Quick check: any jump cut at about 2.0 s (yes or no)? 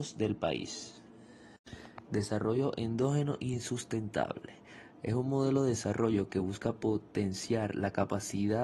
yes